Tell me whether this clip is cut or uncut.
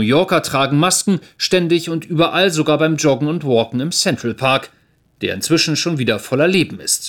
uncut